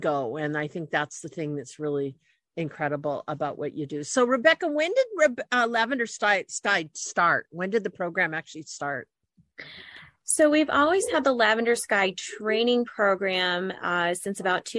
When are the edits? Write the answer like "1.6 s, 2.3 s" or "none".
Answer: none

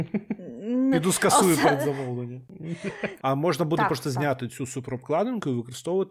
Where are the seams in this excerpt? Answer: 0.9 s, 3.2 s

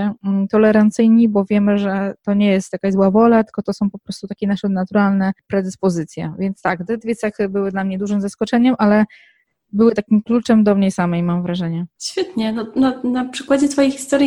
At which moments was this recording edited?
none

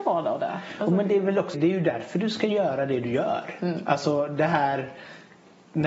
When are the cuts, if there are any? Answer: 1.5 s

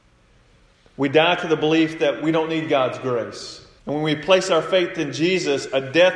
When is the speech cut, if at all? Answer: 3.8 s

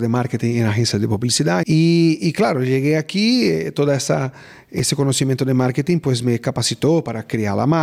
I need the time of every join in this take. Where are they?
1.6 s

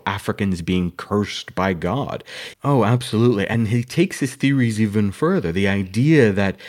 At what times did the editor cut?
2.5 s

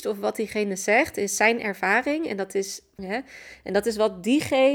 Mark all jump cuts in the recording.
3.0 s

